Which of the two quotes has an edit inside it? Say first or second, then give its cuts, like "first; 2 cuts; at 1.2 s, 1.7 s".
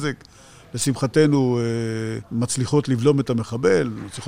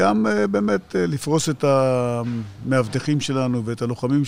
first; 1 cut; at 2.2 s